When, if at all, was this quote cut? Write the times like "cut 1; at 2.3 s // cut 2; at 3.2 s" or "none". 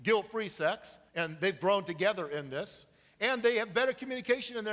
cut 1; at 1.1 s